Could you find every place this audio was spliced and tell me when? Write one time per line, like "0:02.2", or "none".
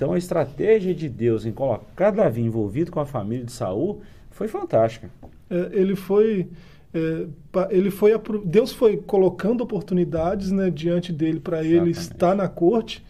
none